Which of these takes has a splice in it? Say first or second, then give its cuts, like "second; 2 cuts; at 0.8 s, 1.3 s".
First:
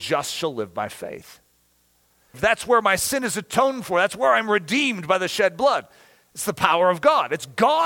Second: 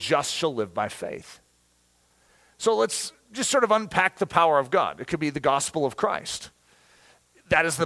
first; 1 cut; at 2.3 s